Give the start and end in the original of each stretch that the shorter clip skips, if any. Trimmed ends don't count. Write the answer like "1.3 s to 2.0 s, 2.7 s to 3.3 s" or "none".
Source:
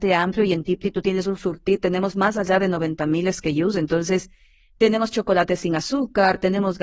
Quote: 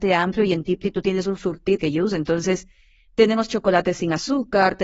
1.8 s to 3.4 s

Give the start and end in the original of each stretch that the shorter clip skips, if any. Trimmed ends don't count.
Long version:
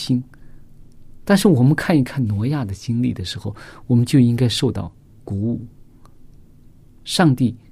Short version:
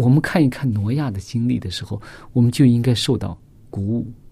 none

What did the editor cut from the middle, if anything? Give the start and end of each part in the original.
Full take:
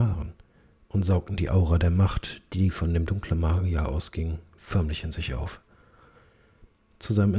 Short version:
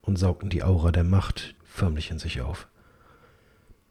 2.4 s to 4.5 s

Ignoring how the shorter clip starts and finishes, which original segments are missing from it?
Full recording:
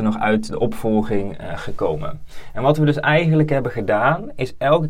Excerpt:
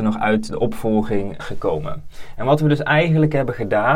1.4 s to 1.6 s

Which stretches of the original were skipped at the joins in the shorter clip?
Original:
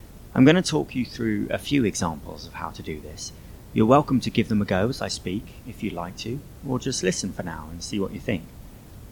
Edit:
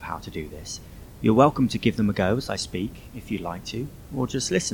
none

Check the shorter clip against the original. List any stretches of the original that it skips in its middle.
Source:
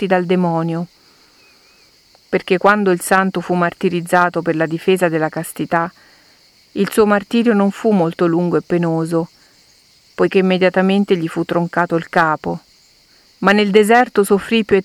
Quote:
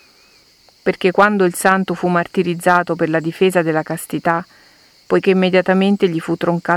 6.5 s to 10.1 s

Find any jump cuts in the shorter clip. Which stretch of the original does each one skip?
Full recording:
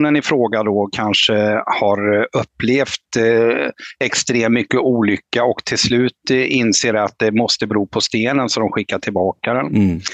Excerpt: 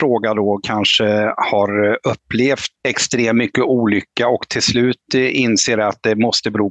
3.1 s to 4.0 s

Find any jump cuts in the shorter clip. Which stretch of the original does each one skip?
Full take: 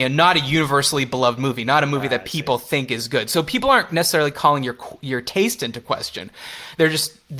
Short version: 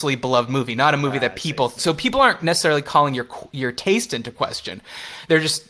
2.7 s to 3.3 s

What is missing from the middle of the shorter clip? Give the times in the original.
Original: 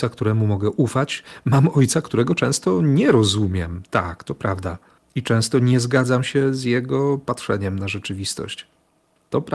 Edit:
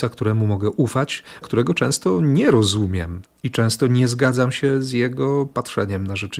1.4 s to 2.0 s, 3.9 s to 5.0 s

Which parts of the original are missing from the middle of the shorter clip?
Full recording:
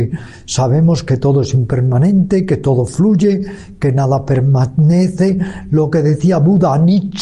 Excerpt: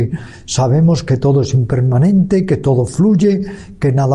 none

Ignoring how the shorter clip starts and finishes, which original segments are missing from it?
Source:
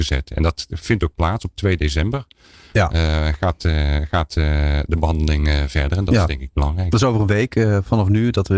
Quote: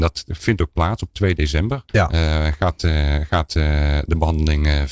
2.3 s to 2.7 s

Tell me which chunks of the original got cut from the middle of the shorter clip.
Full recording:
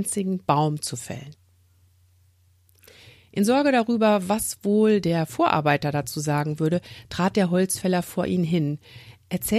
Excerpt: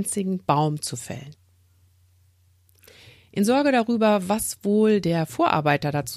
none

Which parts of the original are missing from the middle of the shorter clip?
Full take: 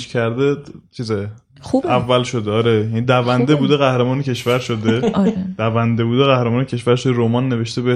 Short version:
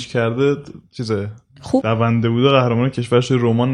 1.8 s to 5.6 s

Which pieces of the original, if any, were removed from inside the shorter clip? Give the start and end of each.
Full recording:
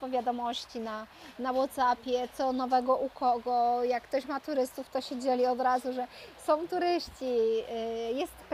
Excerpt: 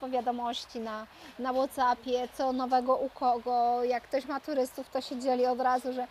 none

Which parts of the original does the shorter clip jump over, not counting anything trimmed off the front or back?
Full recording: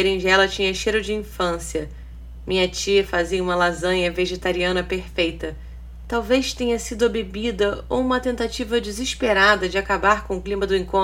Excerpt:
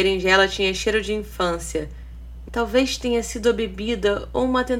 2.5 s to 6.0 s

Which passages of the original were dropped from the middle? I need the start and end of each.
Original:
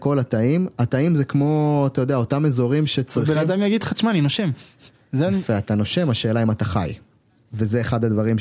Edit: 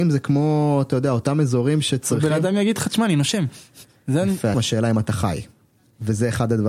5.6 s to 6.1 s

